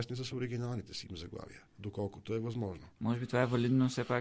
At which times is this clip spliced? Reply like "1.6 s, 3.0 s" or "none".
none